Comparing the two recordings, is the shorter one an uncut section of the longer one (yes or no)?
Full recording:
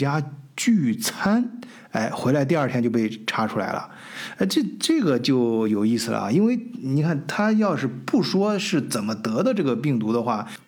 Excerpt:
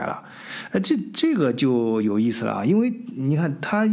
yes